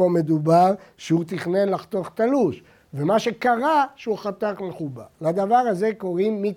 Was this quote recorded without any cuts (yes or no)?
yes